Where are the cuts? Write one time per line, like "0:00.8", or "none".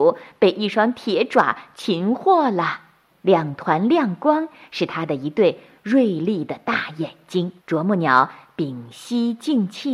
0:03.1
0:07.6